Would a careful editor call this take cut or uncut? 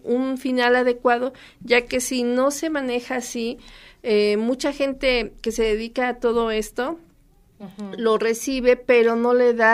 uncut